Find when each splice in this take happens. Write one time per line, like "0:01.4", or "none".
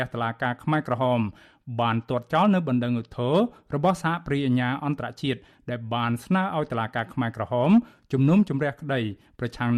none